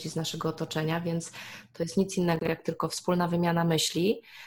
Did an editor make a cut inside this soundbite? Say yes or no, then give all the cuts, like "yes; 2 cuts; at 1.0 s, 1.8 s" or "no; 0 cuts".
no; 0 cuts